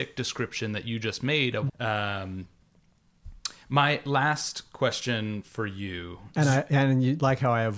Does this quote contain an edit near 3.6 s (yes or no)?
no